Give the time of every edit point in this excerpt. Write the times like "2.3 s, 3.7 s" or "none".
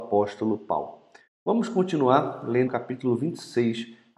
2.7 s